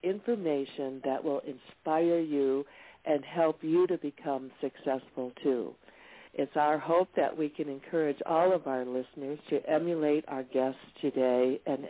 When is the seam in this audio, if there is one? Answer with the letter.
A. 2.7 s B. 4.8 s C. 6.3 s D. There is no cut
C